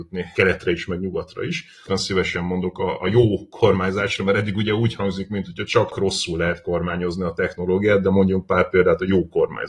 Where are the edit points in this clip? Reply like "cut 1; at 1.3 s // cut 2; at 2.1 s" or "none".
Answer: cut 1; at 1.8 s